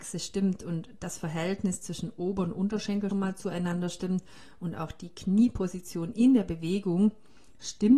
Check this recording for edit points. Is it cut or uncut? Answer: cut